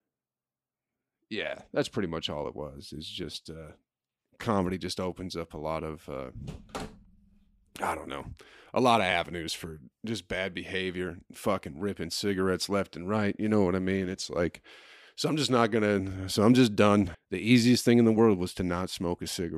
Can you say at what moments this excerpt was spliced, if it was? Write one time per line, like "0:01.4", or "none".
0:17.1